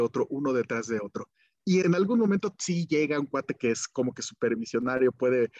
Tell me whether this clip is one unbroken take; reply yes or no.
no